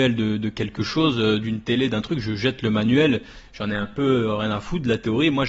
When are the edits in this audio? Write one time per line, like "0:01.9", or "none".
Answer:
none